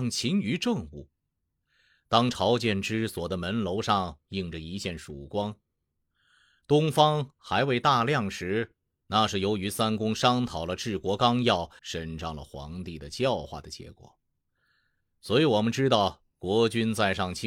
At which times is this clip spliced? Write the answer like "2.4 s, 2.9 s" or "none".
9.0 s, 11.8 s